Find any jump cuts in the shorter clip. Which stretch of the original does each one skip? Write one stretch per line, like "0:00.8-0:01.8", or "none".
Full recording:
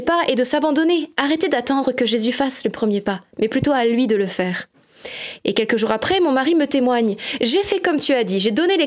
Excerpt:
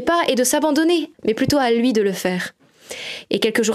0:01.1-0:03.3